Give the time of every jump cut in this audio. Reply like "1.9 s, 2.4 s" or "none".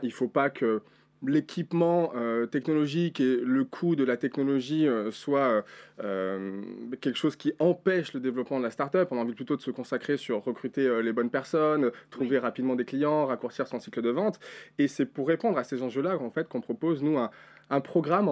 none